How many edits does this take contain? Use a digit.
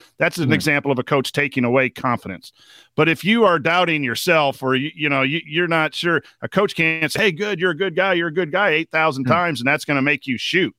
0